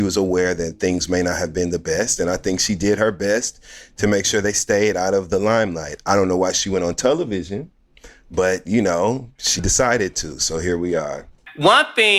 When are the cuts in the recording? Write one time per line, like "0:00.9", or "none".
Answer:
none